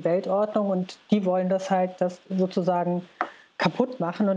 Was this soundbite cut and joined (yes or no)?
yes